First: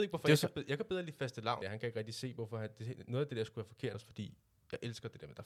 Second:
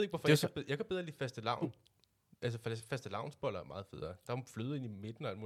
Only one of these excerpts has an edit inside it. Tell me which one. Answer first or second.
first